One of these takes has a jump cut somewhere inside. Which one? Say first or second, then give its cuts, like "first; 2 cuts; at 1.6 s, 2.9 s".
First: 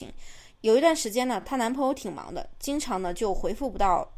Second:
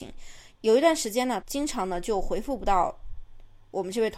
second; 1 cut; at 1.4 s